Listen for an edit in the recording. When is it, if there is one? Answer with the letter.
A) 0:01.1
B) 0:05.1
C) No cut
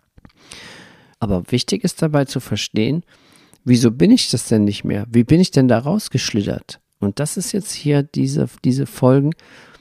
A